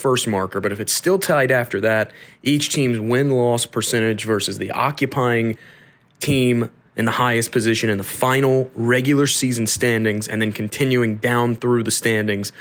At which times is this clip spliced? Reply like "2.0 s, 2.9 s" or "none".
none